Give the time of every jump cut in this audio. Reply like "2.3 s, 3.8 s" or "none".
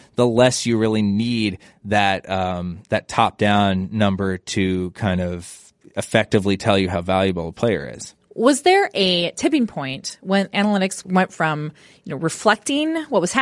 8.2 s